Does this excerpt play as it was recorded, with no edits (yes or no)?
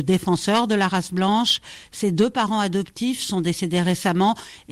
yes